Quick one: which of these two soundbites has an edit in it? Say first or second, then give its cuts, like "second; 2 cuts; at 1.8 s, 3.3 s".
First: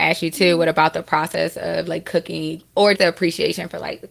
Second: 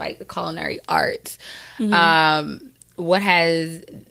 first; 1 cut; at 3.0 s